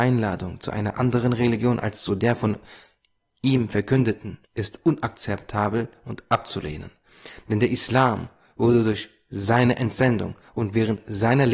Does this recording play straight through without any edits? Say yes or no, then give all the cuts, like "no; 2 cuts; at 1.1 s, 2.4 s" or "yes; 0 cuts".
no; 1 cut; at 4.4 s